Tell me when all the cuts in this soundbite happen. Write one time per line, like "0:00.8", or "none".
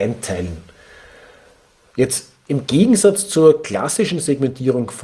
none